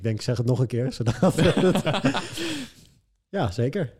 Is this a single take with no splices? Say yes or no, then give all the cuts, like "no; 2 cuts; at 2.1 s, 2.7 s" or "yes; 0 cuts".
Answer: yes; 0 cuts